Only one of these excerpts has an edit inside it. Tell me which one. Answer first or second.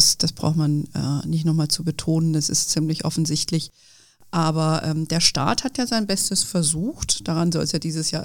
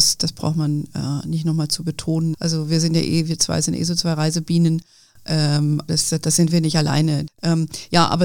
second